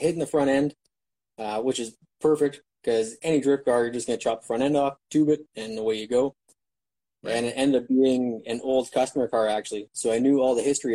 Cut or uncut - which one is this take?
uncut